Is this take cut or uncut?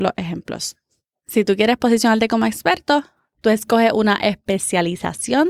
uncut